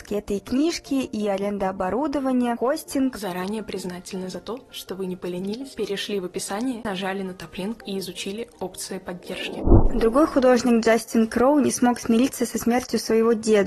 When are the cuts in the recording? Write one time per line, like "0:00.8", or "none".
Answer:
none